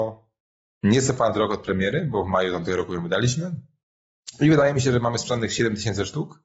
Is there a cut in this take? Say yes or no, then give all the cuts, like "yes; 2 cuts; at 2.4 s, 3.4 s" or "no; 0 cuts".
no; 0 cuts